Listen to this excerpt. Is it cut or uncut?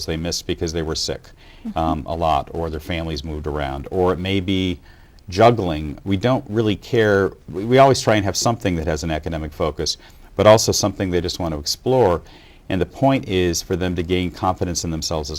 uncut